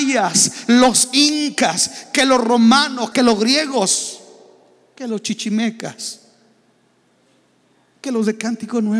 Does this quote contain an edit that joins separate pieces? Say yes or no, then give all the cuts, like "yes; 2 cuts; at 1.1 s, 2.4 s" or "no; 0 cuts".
yes; 1 cut; at 3.1 s